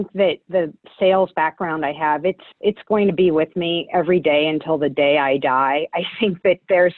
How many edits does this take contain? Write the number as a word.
one